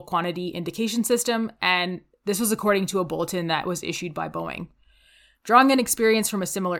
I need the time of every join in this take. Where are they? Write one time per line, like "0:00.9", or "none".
0:05.3